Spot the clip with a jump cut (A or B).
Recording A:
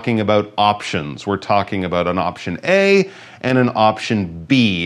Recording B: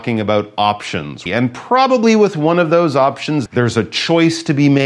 B